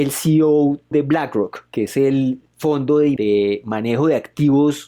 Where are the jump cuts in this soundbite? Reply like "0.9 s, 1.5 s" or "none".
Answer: none